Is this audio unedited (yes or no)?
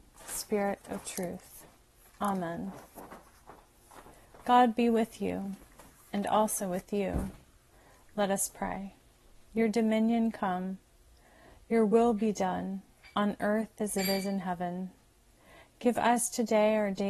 no